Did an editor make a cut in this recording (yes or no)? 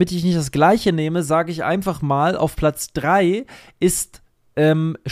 no